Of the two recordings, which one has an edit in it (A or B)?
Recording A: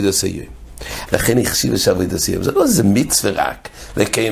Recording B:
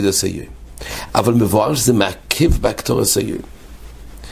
A